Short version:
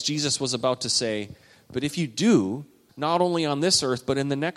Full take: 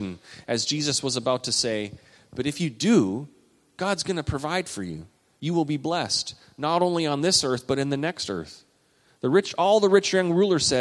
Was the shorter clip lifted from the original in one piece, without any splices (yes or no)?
no